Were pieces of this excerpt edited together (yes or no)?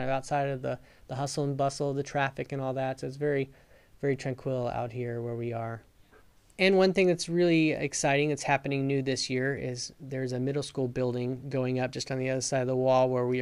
no